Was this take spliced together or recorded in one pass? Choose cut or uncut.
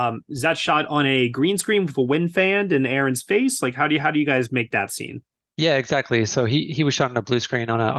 uncut